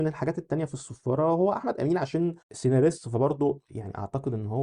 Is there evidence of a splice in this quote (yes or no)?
yes